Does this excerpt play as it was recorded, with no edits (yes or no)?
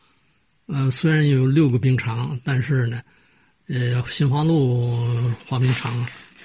yes